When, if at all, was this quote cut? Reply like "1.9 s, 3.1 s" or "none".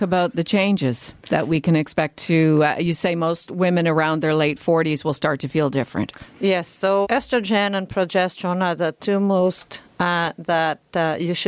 1.2 s, 7.0 s, 9.9 s